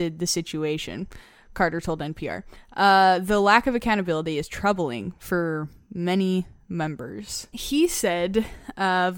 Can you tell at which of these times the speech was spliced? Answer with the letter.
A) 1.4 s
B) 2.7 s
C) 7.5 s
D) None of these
C